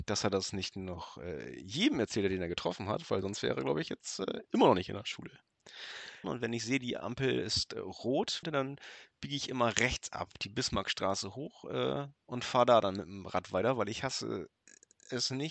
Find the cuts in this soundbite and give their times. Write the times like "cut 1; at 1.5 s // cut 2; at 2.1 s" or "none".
cut 1; at 6.2 s // cut 2; at 8.4 s